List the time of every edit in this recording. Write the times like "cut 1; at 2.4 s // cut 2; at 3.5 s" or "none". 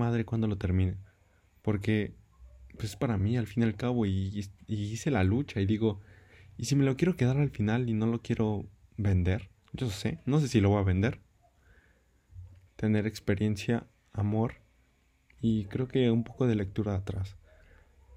cut 1; at 1.6 s // cut 2; at 9.6 s // cut 3; at 12.7 s